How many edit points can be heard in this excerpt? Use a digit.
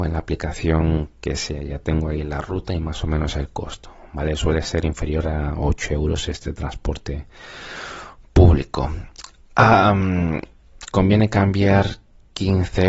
1